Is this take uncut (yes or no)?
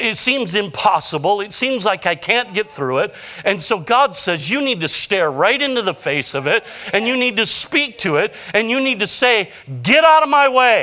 yes